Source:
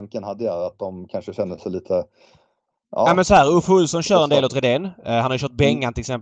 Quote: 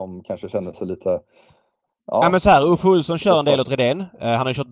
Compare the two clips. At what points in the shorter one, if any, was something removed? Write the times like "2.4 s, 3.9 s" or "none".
none